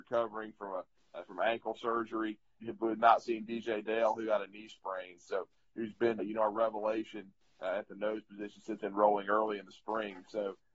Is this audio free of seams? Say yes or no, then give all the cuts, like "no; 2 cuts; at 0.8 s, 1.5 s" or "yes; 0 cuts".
no; 2 cuts; at 2.6 s, 6.2 s